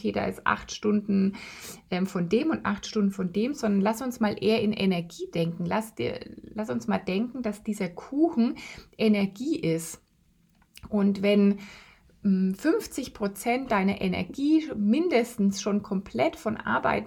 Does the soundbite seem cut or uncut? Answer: uncut